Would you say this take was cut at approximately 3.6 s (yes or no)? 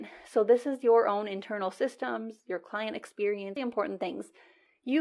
yes